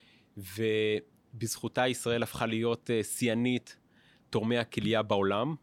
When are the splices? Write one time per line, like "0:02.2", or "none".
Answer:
none